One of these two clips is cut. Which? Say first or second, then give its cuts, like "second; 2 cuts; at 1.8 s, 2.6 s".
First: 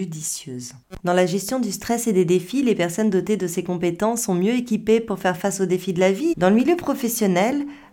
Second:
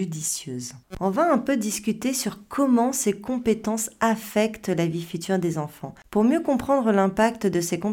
first; 2 cuts; at 1.0 s, 6.3 s